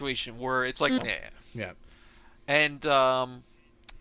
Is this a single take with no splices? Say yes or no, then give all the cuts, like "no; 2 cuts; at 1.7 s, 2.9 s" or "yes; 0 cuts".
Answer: no; 1 cut; at 1.0 s